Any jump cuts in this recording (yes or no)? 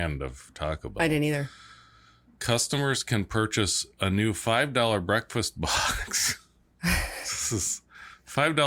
no